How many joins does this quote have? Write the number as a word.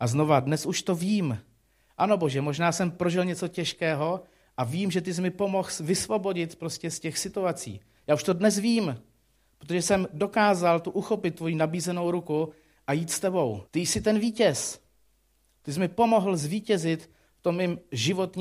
one